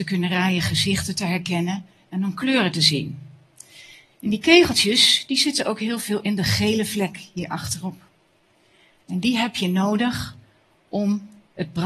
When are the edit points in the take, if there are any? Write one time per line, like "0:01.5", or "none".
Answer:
none